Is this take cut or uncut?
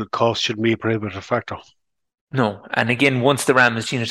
uncut